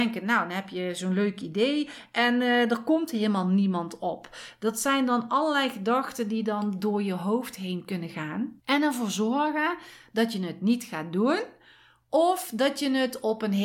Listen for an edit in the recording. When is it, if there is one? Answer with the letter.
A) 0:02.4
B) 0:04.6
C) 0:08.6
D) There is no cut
D